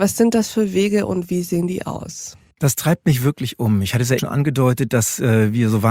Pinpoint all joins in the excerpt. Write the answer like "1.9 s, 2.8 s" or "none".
4.2 s

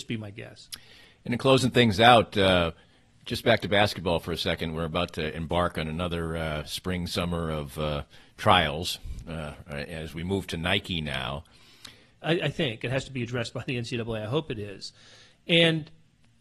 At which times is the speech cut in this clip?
12.2 s

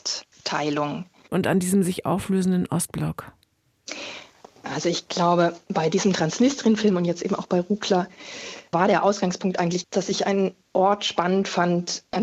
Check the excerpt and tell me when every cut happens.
1.3 s

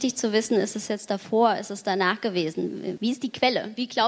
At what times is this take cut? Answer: 3.0 s

